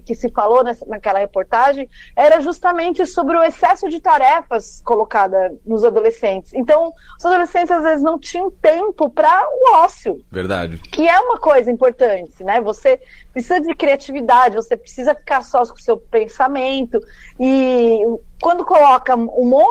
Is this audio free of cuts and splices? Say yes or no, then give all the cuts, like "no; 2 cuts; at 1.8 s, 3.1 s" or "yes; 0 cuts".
yes; 0 cuts